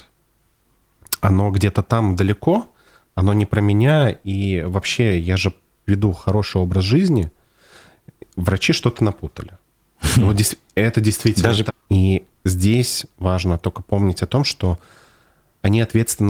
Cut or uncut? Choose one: cut